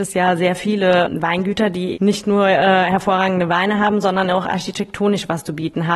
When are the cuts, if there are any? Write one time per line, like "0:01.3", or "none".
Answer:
0:01.9